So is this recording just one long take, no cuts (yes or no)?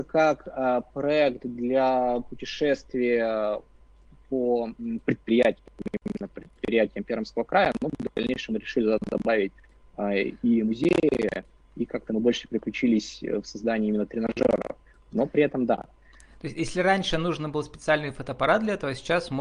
yes